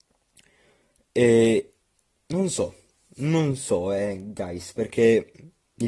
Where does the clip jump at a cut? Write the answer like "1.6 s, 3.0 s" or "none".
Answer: none